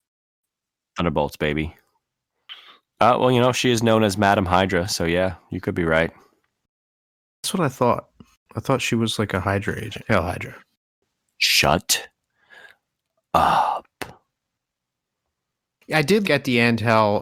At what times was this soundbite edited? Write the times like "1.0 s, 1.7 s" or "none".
10.0 s, 16.2 s